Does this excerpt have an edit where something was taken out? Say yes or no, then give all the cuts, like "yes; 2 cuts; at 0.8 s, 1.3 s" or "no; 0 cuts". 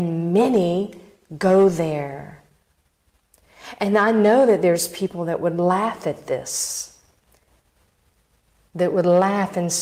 no; 0 cuts